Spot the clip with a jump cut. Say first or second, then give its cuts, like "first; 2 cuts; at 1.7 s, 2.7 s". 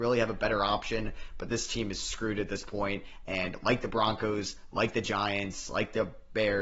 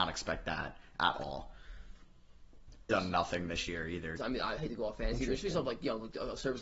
second; 2 cuts; at 2.9 s, 4.2 s